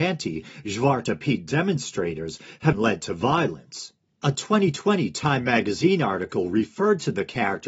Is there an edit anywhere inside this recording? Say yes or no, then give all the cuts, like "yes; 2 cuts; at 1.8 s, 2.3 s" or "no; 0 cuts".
yes; 1 cut; at 2.7 s